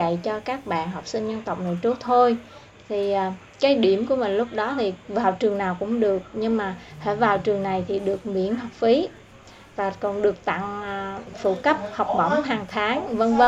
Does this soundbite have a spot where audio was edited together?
no; 0 cuts

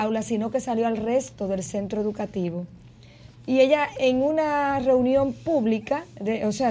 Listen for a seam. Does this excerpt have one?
yes; 1 cut; at 3.3 s

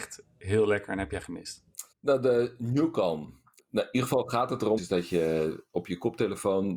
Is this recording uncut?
no; 3 cuts; at 1.9 s, 3.6 s, 4.8 s

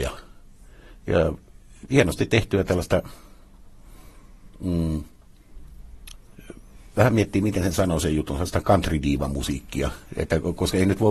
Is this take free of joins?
yes; 0 cuts

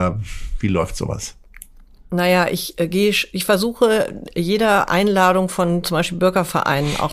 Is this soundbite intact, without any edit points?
yes; 0 cuts

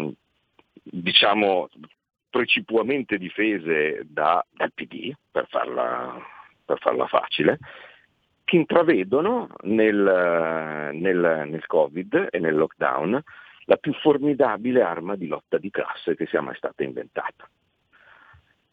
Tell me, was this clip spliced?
yes; 1 cut; at 4.4 s

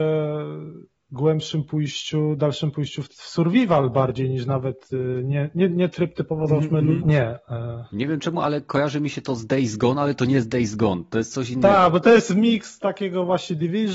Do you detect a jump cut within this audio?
yes; 1 cut; at 7.0 s

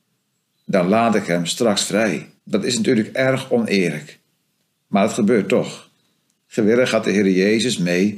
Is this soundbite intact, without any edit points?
no; 1 cut; at 2.4 s

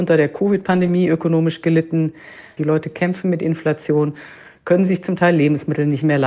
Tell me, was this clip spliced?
yes; 1 cut; at 2.6 s

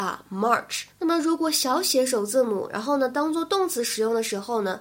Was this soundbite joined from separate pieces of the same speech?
yes; 1 cut; at 0.9 s

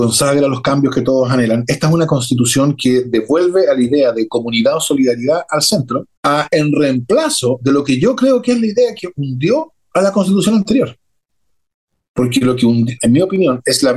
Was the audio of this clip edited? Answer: yes; 2 cuts; at 6.2 s, 13.0 s

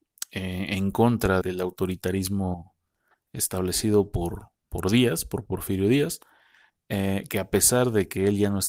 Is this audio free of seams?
no; 1 cut; at 1.4 s

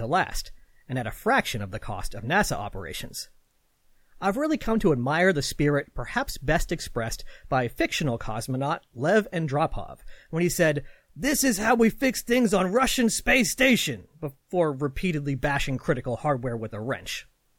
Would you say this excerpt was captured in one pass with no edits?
yes; 0 cuts

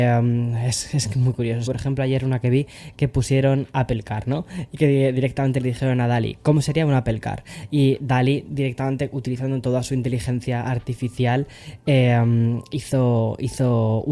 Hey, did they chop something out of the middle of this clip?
yes; 1 cut; at 1.7 s

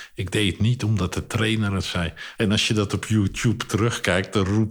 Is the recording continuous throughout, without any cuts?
no; 1 cut; at 2.4 s

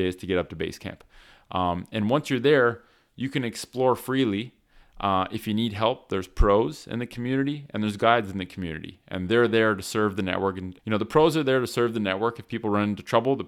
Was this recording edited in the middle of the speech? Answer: yes; 1 cut; at 10.8 s

